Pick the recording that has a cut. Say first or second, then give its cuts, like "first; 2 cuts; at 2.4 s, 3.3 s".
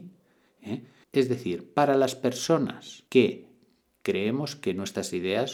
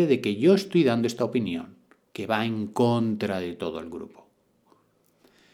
first; 2 cuts; at 1.0 s, 3.1 s